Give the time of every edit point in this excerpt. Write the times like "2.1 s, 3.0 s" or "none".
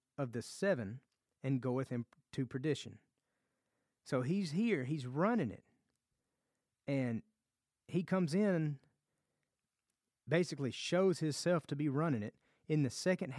none

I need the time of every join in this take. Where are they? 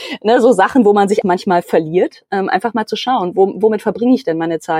1.2 s

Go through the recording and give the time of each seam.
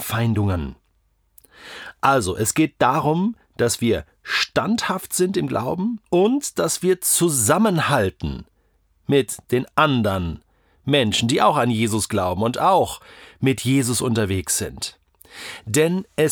6.1 s

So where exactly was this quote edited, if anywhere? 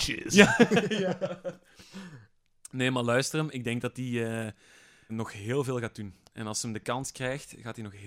5.1 s

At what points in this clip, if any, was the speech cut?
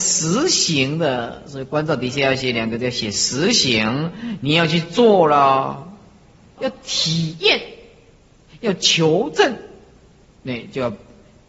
6.6 s

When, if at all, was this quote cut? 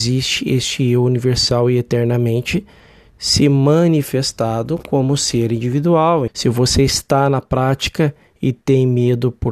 6.3 s

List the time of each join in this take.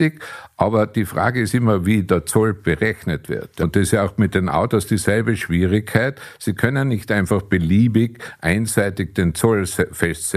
3.6 s

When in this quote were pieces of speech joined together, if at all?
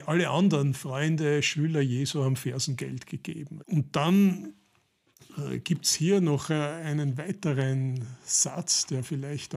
3.6 s

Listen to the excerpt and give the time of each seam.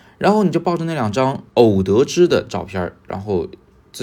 1.5 s

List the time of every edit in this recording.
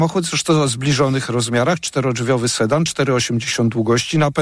none

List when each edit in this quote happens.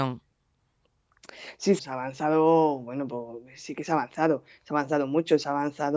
1.8 s

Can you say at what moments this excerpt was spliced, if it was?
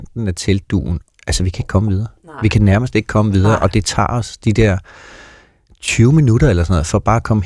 1.2 s

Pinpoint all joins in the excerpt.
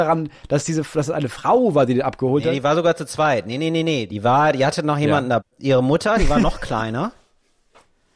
5.4 s

